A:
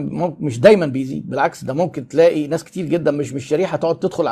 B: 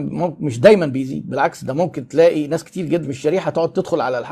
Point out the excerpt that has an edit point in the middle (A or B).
B